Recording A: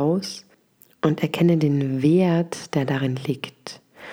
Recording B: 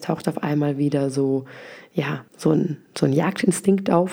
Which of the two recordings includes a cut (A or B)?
B